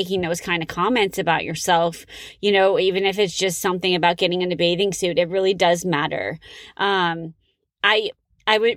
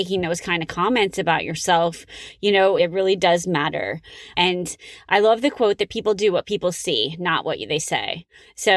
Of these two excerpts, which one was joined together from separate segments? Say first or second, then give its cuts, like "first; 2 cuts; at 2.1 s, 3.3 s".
second; 2 cuts; at 2.8 s, 4.3 s